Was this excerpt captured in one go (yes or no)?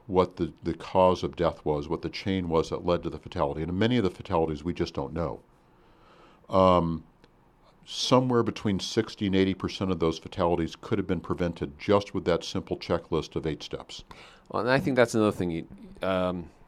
yes